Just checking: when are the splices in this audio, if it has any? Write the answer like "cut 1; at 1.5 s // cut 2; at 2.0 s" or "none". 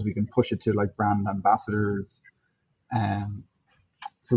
cut 1; at 2.7 s